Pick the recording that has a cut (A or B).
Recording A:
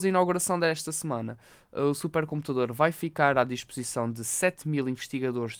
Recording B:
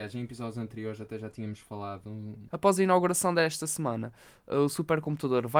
B